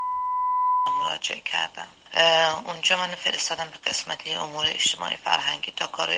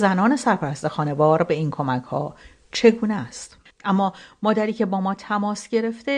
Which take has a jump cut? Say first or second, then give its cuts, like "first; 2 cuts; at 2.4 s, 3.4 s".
second; 1 cut; at 3.7 s